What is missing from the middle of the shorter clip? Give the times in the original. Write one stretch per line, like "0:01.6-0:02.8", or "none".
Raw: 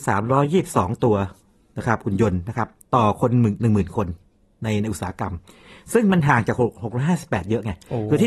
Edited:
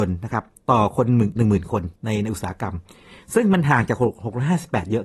0:04.2-0:04.5